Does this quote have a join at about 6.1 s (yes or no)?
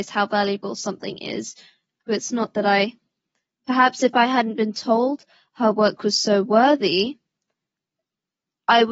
no